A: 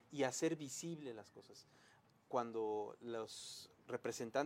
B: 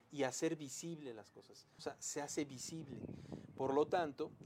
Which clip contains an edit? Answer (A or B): B